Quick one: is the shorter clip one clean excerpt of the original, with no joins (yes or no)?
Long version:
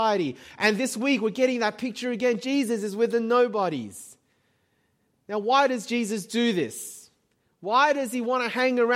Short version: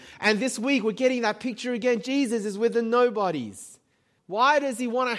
no